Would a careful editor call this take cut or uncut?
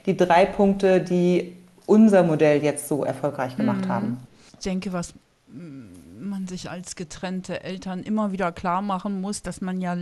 uncut